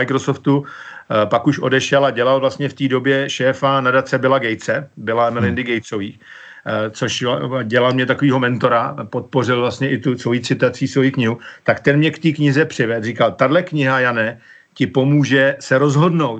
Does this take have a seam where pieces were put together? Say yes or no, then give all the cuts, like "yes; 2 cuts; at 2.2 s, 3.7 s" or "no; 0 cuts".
no; 0 cuts